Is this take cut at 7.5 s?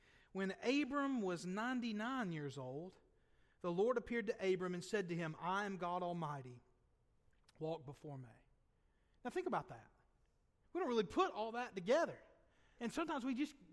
no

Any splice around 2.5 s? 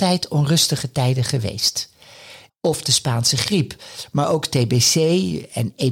yes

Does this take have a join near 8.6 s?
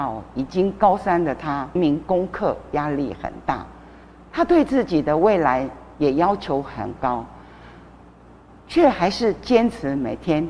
no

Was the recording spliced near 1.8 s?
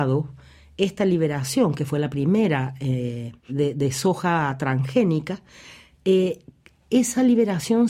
no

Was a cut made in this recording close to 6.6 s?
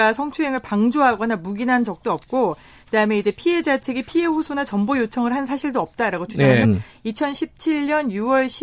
yes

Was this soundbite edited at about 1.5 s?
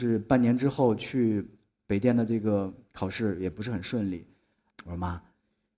no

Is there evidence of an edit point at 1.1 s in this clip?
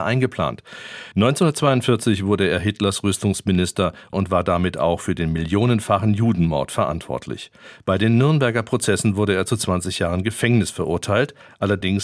no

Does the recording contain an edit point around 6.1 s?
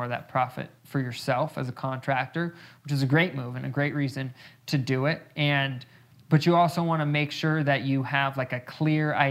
yes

